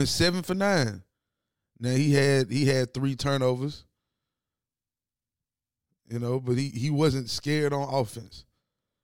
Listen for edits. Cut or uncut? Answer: uncut